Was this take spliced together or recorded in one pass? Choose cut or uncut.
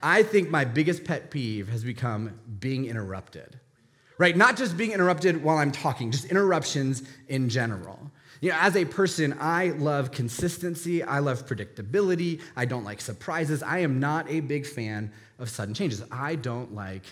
uncut